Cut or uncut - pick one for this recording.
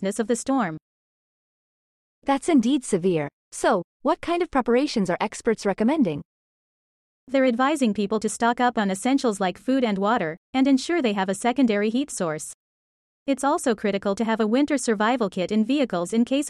uncut